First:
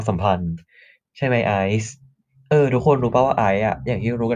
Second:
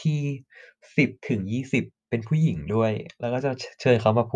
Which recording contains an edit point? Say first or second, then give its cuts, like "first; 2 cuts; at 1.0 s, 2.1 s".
second; 1 cut; at 1.2 s